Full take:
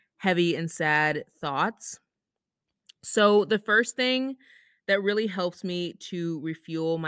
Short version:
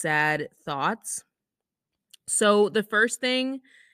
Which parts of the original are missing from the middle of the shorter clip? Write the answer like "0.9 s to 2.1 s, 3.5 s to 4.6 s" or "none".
none